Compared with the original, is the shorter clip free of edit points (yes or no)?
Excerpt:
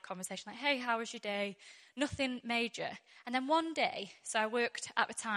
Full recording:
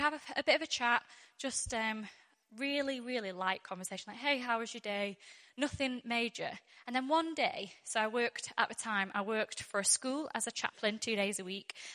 yes